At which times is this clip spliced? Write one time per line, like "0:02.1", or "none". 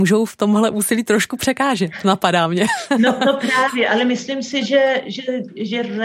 none